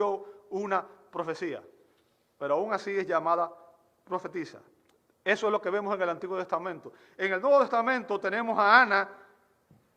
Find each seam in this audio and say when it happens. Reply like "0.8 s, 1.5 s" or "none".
none